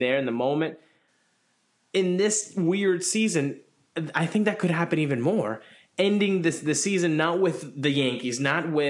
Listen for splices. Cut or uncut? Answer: uncut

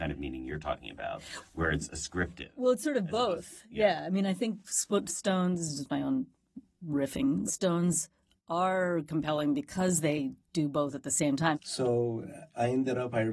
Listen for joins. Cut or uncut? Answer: cut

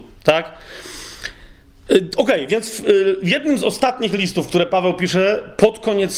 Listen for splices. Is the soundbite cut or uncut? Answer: uncut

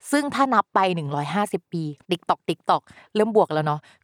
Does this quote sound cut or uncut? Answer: cut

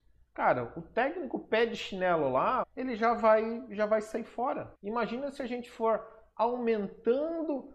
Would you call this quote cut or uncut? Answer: cut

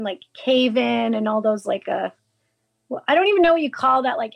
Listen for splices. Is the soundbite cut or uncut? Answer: uncut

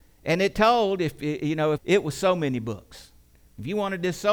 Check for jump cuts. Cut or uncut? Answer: cut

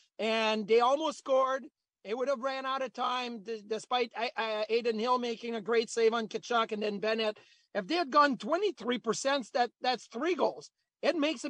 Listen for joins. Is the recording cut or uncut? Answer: cut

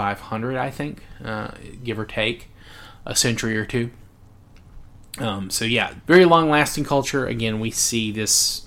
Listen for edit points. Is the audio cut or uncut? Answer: cut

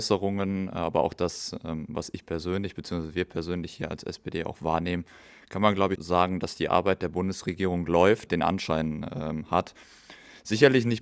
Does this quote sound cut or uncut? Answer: cut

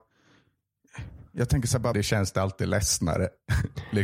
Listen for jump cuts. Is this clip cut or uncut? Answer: cut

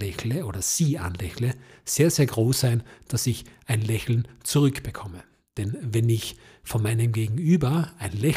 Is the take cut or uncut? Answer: cut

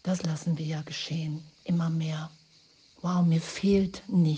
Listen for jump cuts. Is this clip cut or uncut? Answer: uncut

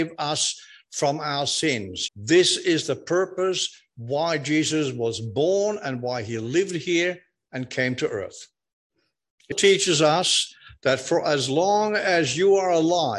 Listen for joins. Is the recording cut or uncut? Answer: cut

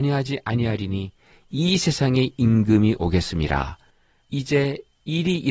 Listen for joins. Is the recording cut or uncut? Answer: cut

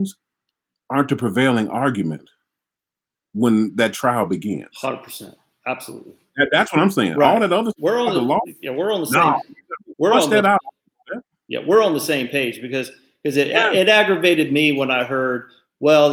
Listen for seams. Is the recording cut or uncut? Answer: uncut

